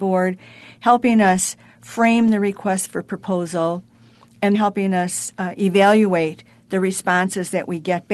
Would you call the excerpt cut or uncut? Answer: cut